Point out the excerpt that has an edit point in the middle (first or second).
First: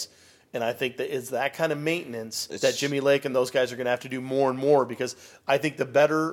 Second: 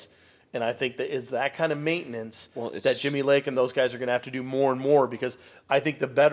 first